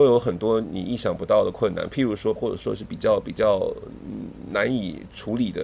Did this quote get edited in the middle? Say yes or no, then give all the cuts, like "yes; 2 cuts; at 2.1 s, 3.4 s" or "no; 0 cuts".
yes; 1 cut; at 2.4 s